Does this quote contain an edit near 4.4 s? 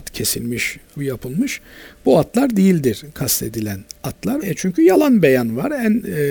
yes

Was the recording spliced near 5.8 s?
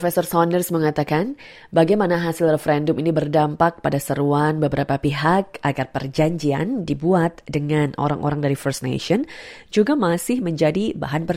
no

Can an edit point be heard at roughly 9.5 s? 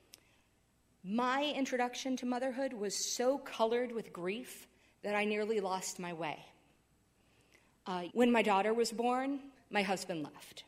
yes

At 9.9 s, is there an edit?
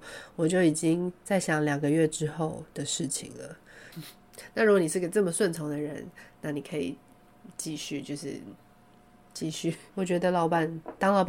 yes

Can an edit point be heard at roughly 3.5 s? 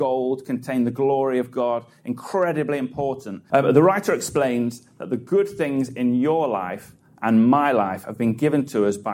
yes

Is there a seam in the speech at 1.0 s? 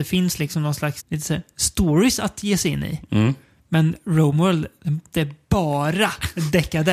yes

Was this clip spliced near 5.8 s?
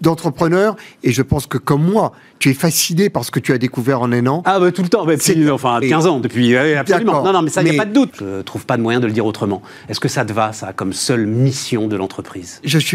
yes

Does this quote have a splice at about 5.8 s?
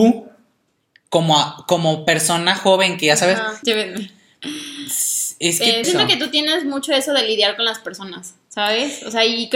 yes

